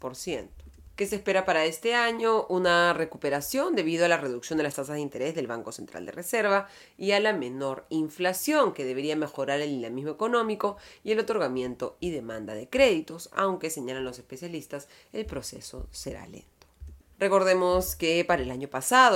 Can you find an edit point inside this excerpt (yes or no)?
yes